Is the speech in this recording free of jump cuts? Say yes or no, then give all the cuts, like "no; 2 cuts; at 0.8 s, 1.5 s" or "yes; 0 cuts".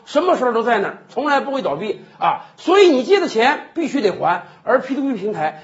yes; 0 cuts